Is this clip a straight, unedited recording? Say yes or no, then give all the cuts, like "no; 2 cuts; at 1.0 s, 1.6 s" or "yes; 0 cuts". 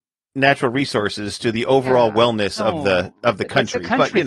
yes; 0 cuts